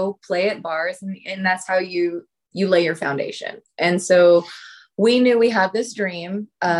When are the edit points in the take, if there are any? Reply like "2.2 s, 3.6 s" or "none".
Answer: none